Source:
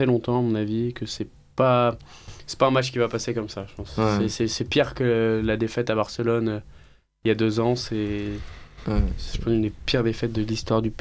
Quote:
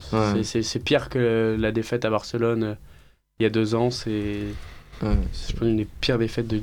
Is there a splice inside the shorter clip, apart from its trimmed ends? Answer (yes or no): no